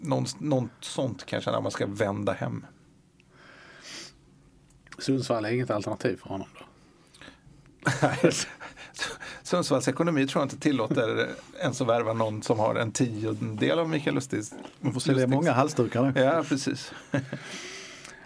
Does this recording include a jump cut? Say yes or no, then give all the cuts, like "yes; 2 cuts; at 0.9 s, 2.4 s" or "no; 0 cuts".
no; 0 cuts